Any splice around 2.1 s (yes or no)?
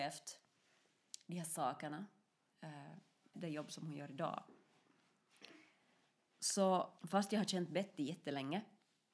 no